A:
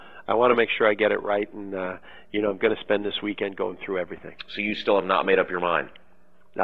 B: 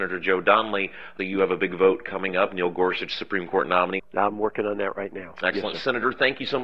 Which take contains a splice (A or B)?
B